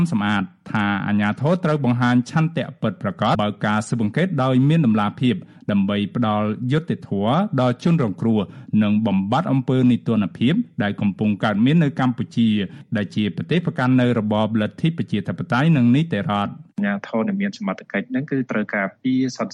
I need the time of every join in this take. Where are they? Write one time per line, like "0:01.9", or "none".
0:03.4